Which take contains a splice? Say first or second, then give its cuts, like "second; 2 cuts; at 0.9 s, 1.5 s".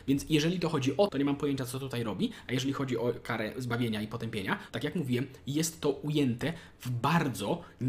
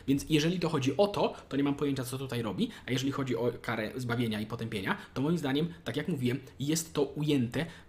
first; 2 cuts; at 1.1 s, 4.7 s